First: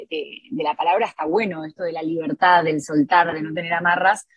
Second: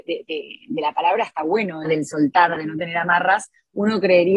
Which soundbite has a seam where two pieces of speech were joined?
second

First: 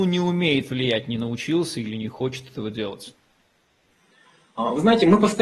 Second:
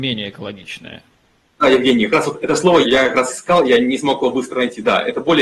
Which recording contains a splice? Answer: second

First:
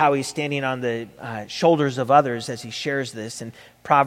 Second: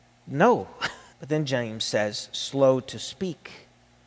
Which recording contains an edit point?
second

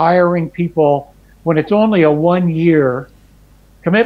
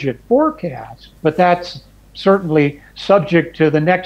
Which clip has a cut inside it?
second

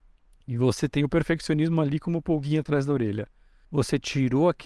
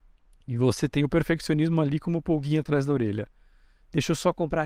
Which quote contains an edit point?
first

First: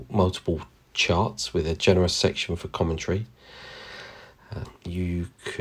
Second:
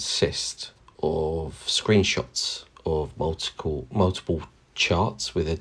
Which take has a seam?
first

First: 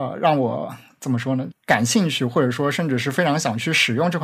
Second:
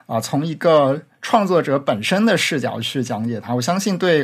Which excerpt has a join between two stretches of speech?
first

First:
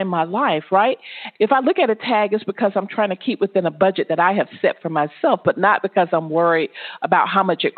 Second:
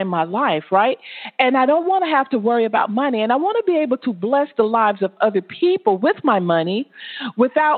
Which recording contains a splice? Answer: first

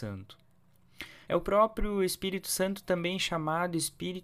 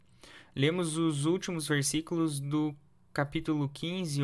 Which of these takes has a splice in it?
first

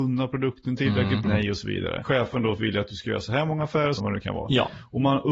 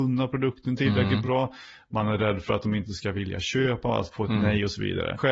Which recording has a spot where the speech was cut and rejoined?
first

